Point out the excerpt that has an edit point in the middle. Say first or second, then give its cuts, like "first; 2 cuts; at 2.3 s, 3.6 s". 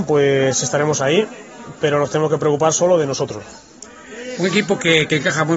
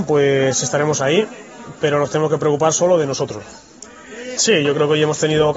second; 1 cut; at 4.4 s